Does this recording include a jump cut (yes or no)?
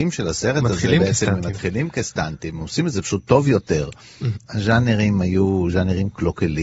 yes